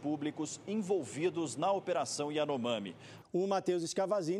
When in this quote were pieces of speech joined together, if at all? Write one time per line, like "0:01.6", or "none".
0:03.2